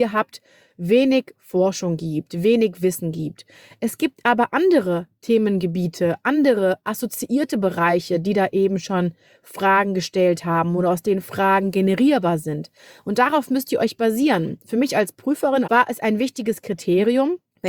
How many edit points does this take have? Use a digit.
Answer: 1